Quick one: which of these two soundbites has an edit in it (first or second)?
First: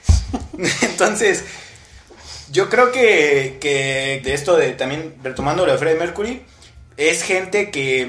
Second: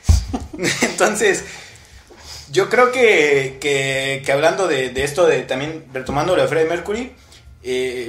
first